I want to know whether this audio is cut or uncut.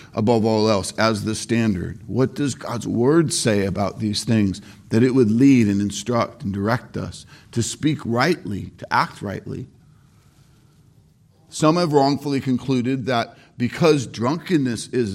uncut